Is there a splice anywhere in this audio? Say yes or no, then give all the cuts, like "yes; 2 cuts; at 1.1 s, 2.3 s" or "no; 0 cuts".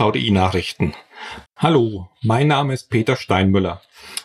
yes; 1 cut; at 1.4 s